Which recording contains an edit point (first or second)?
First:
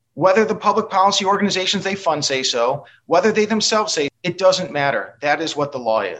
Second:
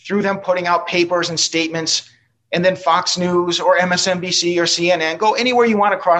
first